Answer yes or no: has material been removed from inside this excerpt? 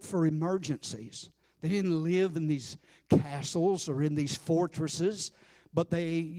yes